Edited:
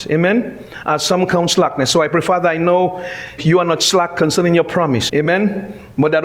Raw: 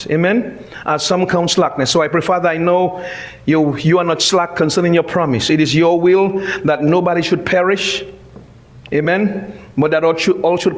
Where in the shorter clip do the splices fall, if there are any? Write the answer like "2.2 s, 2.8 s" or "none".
3.4 s, 5.1 s